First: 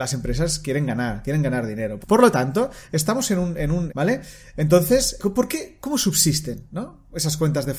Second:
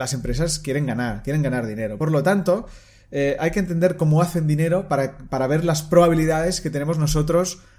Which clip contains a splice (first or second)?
first